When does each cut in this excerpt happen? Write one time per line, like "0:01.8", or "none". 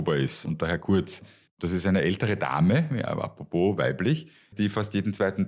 0:01.5
0:04.5